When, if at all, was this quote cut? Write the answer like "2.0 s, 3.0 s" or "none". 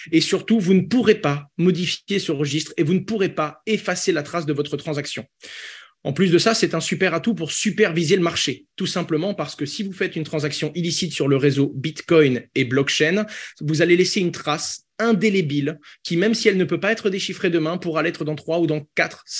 8.7 s